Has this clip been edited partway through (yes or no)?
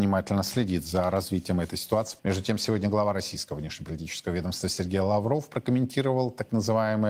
yes